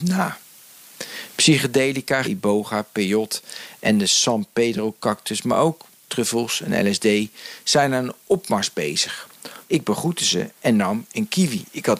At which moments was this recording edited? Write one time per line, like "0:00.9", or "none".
0:02.2
0:09.6